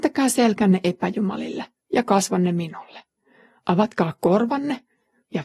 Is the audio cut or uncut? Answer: uncut